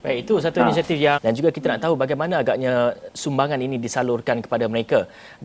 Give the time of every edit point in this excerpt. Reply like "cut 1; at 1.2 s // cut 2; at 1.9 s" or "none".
cut 1; at 1.2 s // cut 2; at 3.1 s